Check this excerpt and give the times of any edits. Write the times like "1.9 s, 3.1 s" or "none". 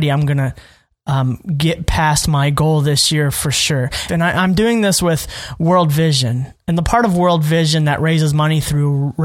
4.1 s